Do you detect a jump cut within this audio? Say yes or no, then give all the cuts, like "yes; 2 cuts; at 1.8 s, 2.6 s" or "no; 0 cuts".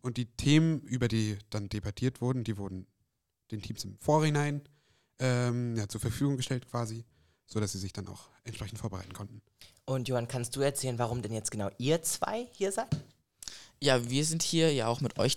no; 0 cuts